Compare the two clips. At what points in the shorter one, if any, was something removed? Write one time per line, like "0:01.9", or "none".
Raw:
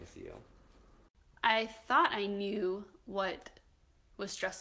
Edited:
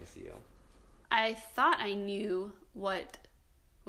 0:01.0